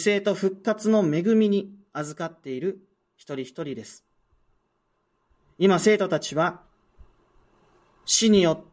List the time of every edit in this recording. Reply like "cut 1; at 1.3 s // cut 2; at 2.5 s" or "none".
none